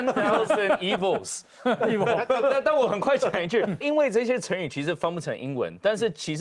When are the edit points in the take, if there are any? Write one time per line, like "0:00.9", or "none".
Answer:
0:03.8